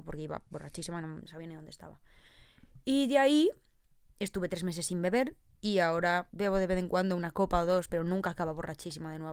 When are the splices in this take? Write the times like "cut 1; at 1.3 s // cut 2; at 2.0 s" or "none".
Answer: cut 1; at 1.2 s // cut 2; at 6.3 s